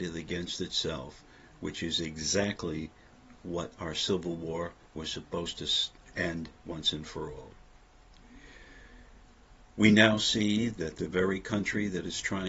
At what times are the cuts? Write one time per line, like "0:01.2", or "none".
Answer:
none